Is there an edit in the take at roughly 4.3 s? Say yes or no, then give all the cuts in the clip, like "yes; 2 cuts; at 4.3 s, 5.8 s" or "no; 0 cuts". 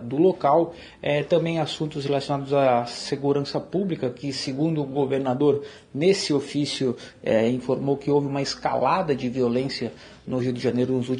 no; 0 cuts